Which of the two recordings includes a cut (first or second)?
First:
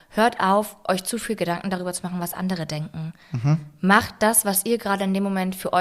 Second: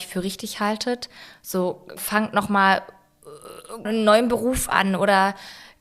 second